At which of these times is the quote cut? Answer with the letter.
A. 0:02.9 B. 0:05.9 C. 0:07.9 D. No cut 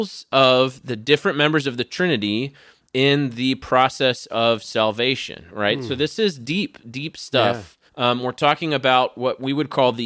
C